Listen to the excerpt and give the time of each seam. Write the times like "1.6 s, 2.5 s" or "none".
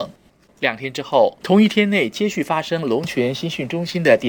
1.4 s